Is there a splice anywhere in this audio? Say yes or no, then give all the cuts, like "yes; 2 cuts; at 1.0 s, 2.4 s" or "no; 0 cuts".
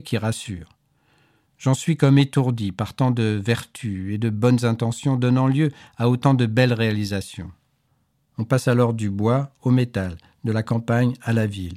yes; 1 cut; at 8.3 s